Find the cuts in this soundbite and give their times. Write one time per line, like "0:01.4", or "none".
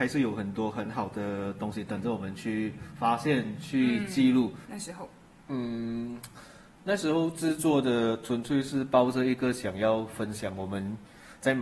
0:04.6